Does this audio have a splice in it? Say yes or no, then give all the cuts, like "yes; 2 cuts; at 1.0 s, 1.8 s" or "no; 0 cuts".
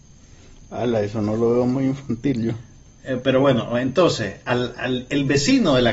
no; 0 cuts